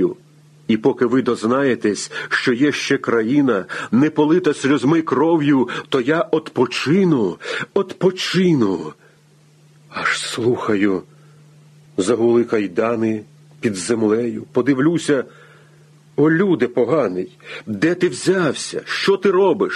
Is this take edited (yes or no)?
no